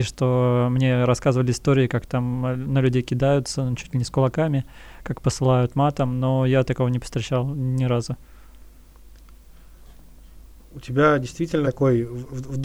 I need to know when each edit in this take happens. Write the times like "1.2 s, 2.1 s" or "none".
11.6 s

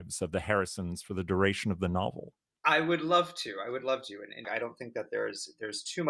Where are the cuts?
4.4 s

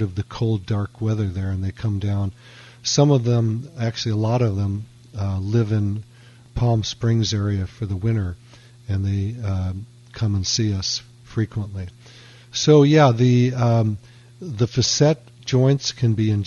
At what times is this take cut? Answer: none

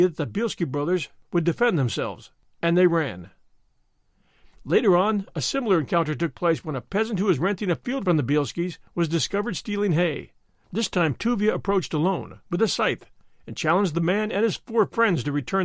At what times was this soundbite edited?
none

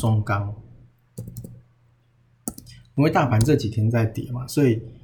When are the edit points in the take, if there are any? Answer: none

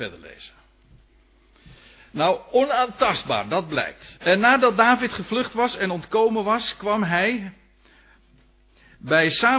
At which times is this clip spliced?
4.2 s

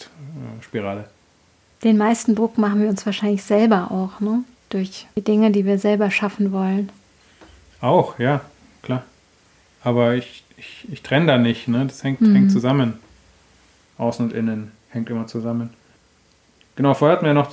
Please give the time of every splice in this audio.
none

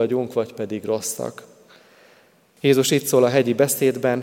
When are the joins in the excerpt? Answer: 2.6 s

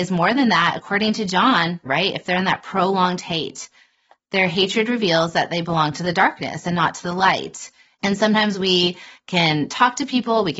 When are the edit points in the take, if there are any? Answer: 1.9 s, 8.0 s

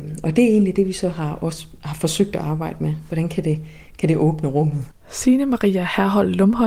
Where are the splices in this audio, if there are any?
4.9 s

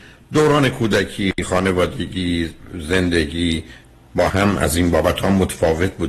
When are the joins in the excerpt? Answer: 4.3 s

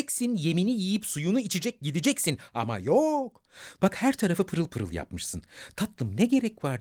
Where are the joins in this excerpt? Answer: 3.8 s

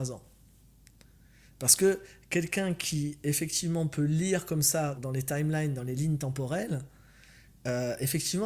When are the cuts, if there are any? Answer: 5.0 s

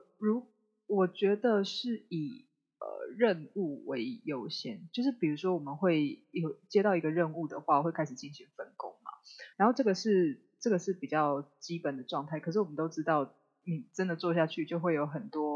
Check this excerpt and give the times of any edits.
9.5 s

